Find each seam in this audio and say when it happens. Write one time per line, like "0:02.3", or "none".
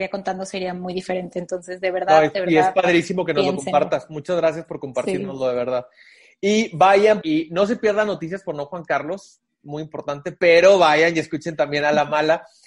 0:07.2